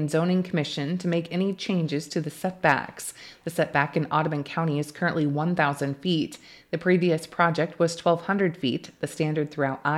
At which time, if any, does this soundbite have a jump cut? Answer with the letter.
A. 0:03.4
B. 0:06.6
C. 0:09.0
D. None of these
D